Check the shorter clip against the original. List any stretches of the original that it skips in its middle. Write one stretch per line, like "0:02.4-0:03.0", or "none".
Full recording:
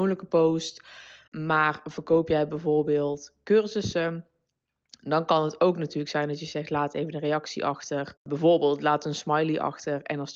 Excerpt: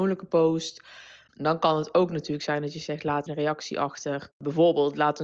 0:01.3-0:05.0
0:06.9-0:07.1

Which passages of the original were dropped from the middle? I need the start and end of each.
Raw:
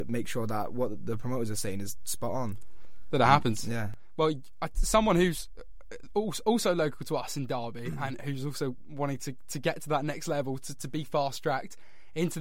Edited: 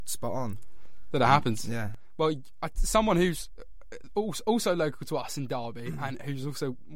none

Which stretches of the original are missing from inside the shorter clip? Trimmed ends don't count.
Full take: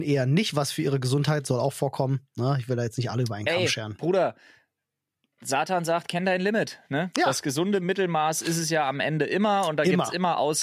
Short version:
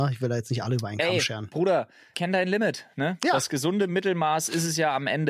0:04.6-0:06.1

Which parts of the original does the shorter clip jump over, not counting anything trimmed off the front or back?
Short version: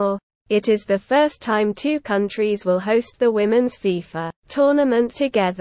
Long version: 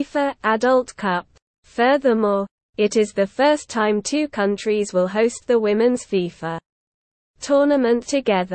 0:06.6-0:07.3

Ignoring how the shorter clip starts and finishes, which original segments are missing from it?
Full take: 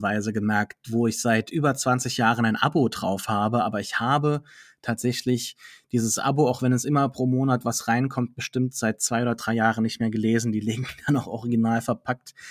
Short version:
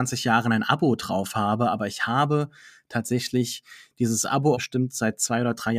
0:06.5-0:08.3

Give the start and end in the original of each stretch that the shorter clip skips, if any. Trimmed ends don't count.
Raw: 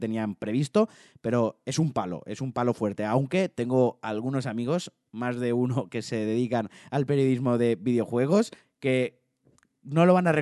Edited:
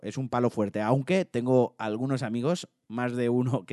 none

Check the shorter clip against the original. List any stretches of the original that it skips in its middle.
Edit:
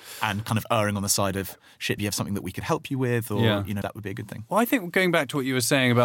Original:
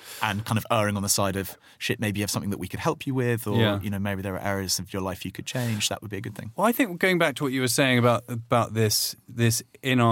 0:02.0-0:02.1
0:04.0-0:05.9

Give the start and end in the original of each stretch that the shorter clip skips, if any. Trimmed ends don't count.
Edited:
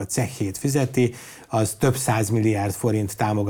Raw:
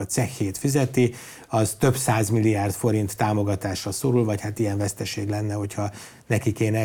none

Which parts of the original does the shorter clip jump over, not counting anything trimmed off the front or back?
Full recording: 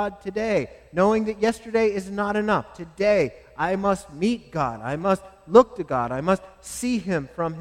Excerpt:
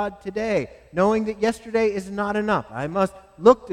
0:02.7-0:04.8

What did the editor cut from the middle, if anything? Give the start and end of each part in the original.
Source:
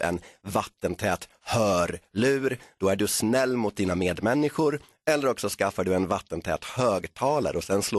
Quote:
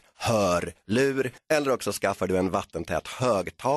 0:02.6-0:04.9

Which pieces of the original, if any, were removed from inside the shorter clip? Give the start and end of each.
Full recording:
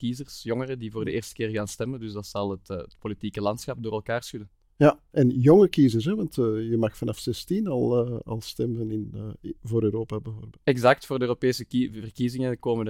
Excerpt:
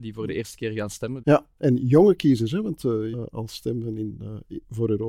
0:02.0-0:04.7
0:06.7-0:08.1

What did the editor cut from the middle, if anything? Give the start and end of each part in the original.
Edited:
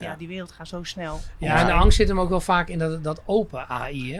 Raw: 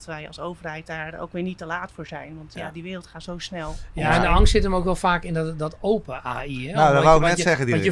none

